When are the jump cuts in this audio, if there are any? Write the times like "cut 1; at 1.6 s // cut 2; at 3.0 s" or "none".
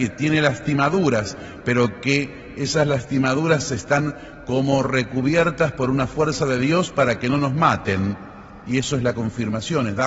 none